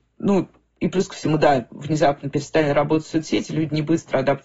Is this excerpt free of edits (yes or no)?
yes